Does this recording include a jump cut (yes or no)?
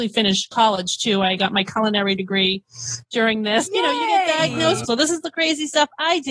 yes